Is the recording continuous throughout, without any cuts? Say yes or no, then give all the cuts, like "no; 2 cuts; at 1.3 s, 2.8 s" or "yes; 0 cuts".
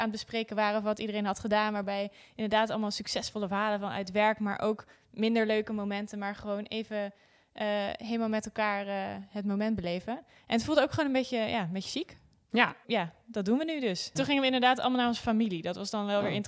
no; 2 cuts; at 12.8 s, 14.2 s